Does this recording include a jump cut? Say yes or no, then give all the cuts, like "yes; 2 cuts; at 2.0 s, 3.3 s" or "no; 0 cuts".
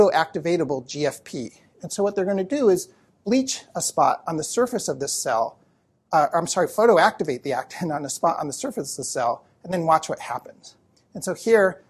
no; 0 cuts